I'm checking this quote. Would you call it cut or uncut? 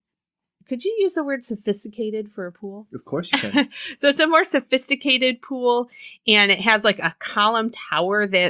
uncut